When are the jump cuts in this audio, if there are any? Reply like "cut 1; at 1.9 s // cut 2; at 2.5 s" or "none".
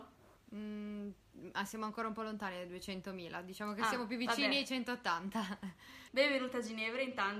cut 1; at 6.1 s